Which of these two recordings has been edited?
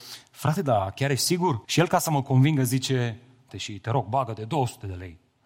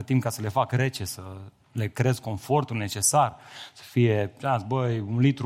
first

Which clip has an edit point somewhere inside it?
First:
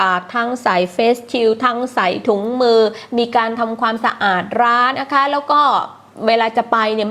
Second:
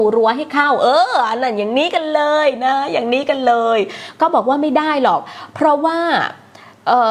first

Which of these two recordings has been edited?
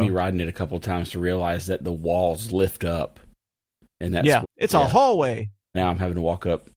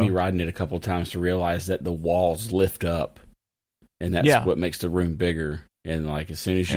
first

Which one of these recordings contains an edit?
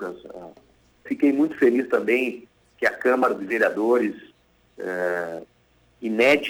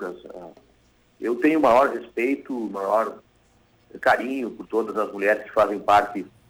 first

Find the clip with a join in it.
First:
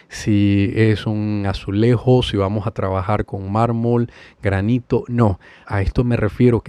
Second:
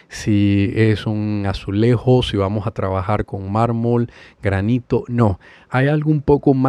first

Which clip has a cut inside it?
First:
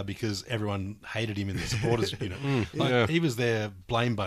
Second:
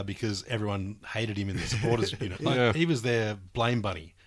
second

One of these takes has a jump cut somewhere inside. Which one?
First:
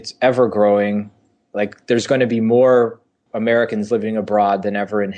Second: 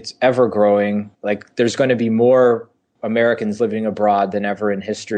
second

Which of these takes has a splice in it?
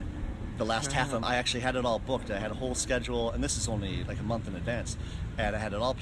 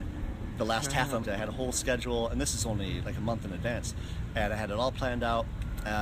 second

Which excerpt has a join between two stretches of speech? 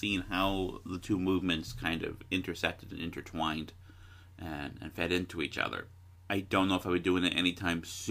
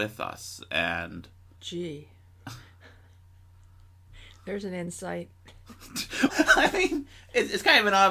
second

